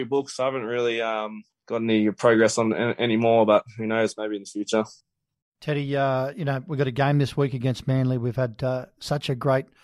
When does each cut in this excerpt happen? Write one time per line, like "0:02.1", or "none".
none